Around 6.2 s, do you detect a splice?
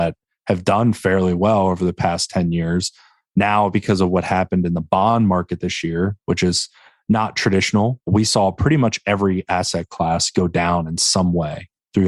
no; 1 cut; at 8.0 s

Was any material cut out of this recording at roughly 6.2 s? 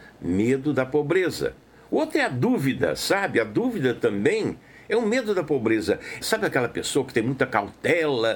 yes; 1 cut; at 6.2 s

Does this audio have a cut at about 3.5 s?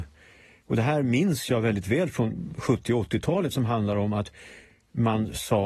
no; 0 cuts

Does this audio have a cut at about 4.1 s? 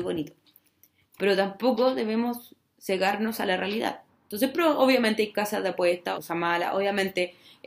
yes; 2 cuts; at 4.1 s, 6.1 s

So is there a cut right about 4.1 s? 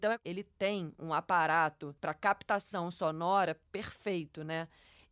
no; 1 cut; at 2.0 s

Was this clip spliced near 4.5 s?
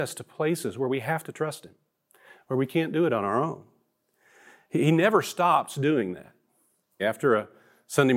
no; 1 cut; at 7.0 s

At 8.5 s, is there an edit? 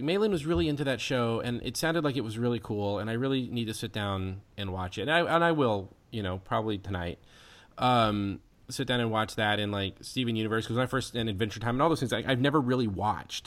no; 0 cuts

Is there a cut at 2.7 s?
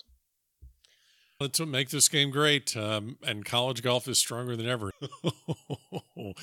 no; 2 cuts; at 1.4 s, 4.9 s

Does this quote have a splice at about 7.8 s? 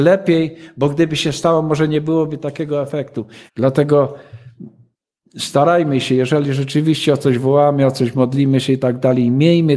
no; 1 cut; at 3.5 s

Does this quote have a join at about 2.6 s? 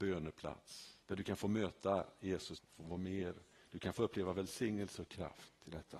yes; 2 cuts; at 1.0 s, 2.6 s

